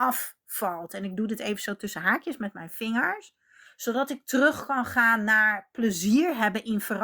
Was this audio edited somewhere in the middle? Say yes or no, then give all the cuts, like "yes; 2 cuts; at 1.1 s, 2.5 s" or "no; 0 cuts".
yes; 1 cut; at 3.6 s